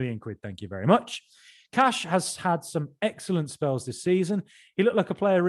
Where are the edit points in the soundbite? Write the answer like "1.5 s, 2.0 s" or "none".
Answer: none